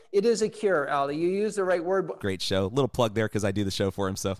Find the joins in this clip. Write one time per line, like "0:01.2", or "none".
0:02.2